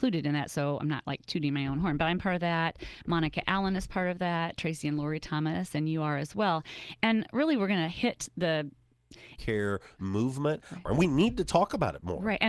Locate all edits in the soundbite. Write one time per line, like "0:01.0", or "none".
0:09.4
0:10.9